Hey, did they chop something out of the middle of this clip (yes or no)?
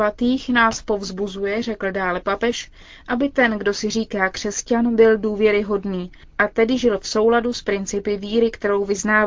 no